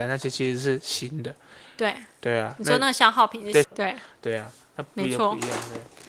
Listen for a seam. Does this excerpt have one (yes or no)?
yes